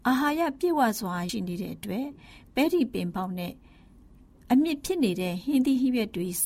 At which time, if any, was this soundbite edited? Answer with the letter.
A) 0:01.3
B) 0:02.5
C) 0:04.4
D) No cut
A